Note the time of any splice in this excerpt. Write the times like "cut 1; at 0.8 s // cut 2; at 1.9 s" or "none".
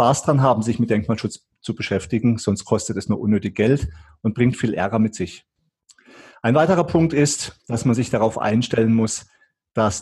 none